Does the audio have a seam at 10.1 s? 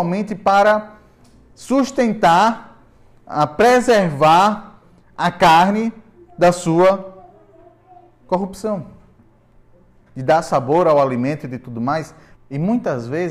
yes; 2 cuts; at 10.1 s, 12.3 s

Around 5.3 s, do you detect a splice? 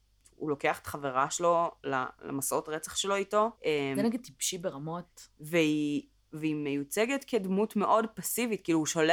no; 1 cut; at 3.5 s

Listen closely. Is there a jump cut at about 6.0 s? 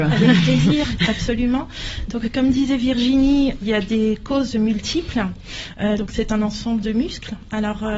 yes; 2 cuts; at 3.6 s, 6.0 s

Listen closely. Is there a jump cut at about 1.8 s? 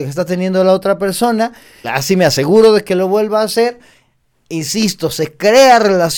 yes; 1 cut; at 1.8 s

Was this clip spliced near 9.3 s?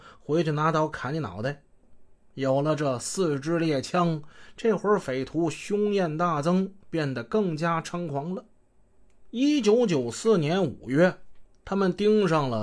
no; 1 cut; at 1.8 s

